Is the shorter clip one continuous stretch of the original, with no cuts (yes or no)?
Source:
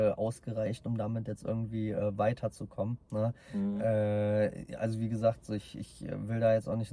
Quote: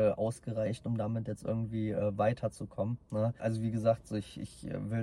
no